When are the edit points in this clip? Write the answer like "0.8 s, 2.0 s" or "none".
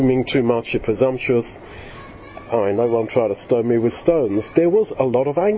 4.5 s